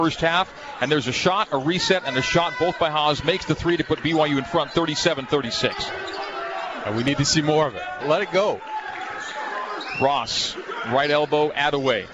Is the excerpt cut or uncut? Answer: cut